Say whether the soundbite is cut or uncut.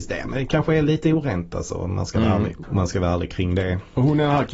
cut